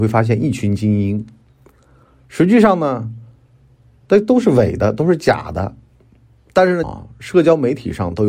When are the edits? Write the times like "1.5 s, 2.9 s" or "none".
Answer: 6.8 s